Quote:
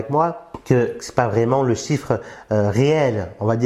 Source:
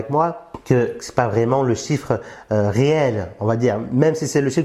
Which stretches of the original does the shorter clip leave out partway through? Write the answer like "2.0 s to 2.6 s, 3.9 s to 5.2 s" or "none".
none

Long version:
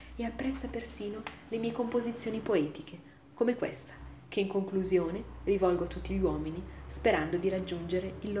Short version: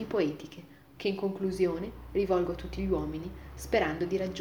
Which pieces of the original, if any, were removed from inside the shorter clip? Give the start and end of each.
3.3 s to 4.3 s

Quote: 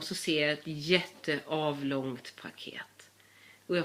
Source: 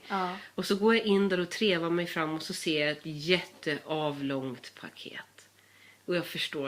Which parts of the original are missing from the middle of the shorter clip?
none

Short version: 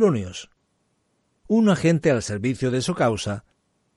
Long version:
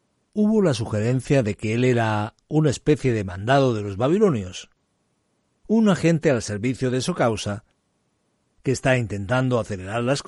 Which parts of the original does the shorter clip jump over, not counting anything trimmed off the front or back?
none

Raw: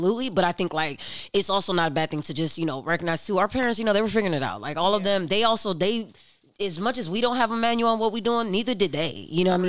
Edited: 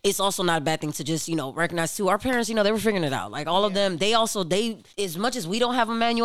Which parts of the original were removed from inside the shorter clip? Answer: 6.2 s to 6.5 s

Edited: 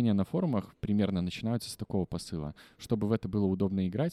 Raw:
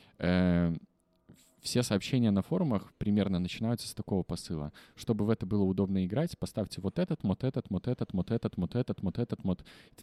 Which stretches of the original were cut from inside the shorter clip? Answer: none

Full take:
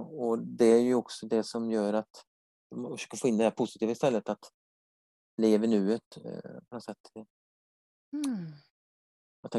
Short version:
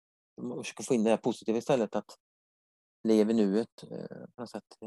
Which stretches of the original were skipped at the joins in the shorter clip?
none

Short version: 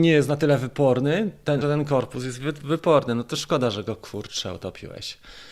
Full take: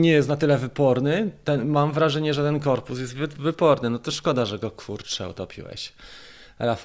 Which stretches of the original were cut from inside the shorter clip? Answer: 1.6 s to 2.4 s

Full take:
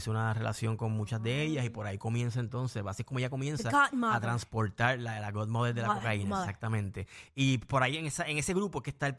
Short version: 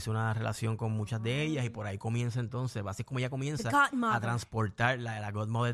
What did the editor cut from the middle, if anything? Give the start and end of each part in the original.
none

